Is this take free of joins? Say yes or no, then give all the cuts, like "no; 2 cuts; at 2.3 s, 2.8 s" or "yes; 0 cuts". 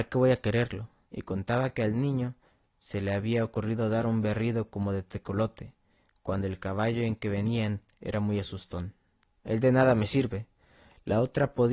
no; 2 cuts; at 1.1 s, 9.4 s